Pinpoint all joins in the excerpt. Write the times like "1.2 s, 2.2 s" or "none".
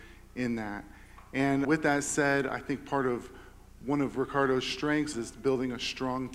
1.6 s, 5.1 s